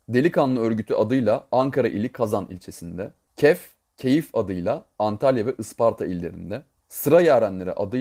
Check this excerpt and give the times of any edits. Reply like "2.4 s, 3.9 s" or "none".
3.2 s, 6.8 s